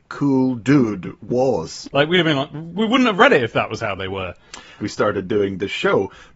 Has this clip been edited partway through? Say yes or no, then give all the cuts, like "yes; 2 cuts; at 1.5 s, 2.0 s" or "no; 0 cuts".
yes; 2 cuts; at 1.8 s, 4.8 s